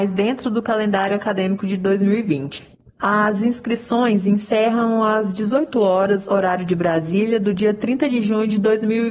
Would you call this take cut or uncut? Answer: uncut